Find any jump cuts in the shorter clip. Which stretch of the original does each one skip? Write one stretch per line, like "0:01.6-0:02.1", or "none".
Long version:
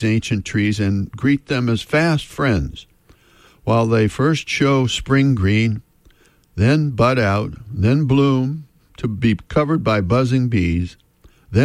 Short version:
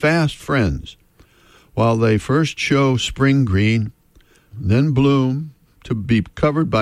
0:06.4-0:07.6